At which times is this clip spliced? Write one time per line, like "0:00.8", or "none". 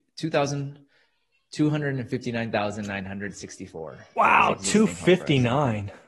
none